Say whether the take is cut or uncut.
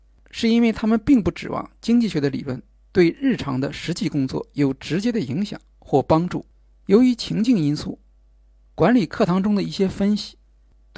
cut